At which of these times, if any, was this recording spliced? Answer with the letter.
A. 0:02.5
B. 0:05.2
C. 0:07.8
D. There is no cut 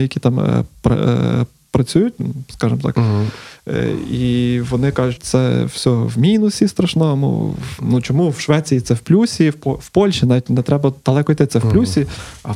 B